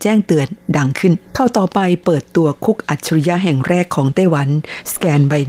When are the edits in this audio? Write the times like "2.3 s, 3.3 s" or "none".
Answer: 1.3 s